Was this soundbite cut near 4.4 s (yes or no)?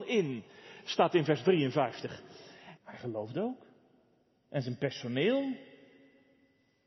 no